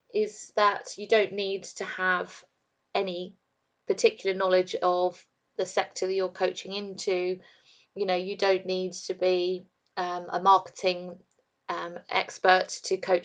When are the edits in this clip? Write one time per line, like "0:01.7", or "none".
none